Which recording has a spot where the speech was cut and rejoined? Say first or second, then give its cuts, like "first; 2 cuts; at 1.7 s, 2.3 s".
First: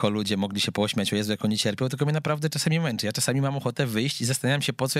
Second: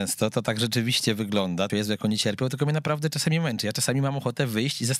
second; 1 cut; at 1.7 s